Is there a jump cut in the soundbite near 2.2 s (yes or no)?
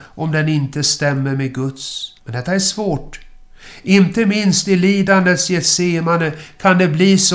yes